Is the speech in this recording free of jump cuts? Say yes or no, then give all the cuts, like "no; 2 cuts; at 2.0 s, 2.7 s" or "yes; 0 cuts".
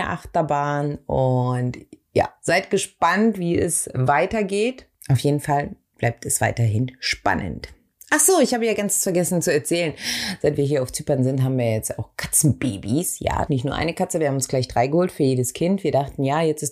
no; 1 cut; at 13.5 s